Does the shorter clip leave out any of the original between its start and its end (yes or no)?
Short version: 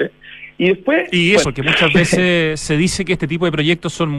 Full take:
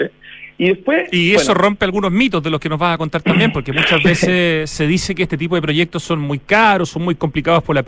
yes